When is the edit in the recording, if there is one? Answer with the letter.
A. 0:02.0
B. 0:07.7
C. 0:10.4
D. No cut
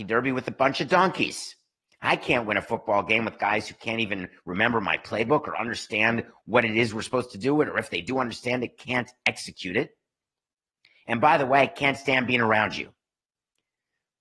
D